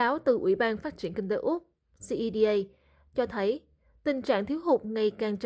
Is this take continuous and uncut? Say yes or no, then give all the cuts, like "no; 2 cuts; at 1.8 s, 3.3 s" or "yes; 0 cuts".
yes; 0 cuts